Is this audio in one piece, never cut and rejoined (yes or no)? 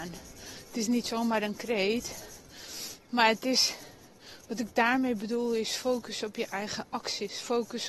yes